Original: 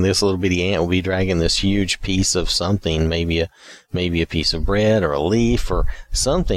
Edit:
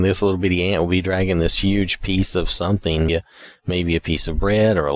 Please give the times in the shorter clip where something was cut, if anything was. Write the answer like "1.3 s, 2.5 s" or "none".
3.1 s